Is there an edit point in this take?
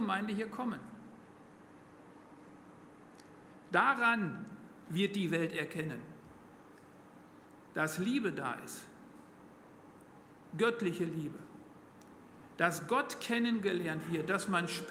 no; 0 cuts

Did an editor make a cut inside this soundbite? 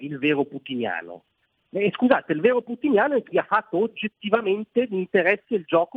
no; 0 cuts

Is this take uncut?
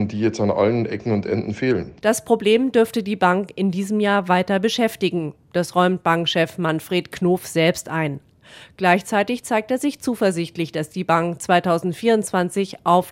yes; 0 cuts

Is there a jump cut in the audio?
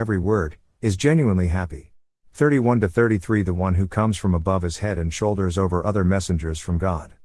yes; 1 cut; at 2.2 s

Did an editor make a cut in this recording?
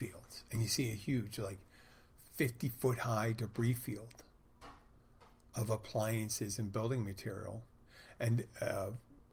no; 0 cuts

